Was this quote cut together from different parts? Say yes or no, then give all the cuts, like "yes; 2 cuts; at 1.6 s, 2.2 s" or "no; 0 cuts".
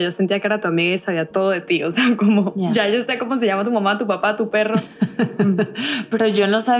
no; 0 cuts